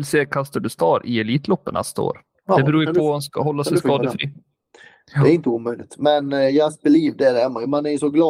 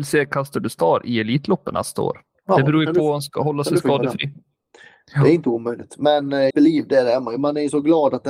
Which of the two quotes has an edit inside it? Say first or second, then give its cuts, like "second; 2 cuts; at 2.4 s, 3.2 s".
second; 1 cut; at 6.5 s